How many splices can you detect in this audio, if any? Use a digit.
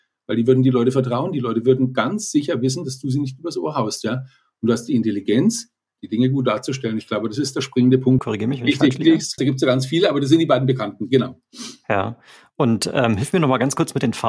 2